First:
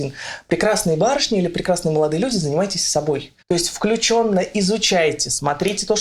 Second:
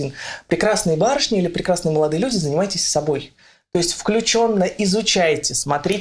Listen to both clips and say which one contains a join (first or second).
first